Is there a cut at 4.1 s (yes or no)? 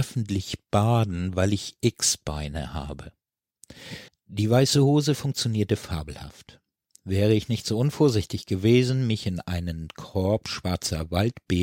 yes